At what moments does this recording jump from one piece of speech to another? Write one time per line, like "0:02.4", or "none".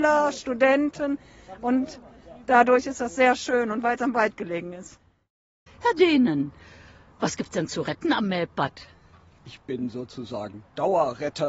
0:05.7
0:09.4

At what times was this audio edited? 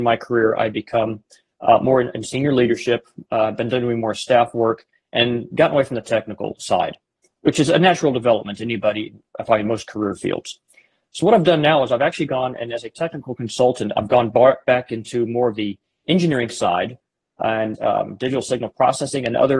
0:17.7

